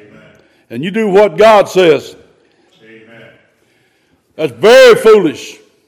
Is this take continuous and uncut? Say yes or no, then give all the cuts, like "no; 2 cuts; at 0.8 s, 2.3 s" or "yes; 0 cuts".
no; 1 cut; at 2.7 s